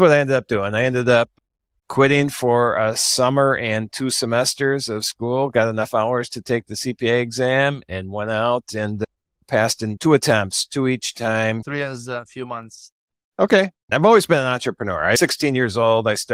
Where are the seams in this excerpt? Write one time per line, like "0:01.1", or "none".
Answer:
0:11.6
0:13.9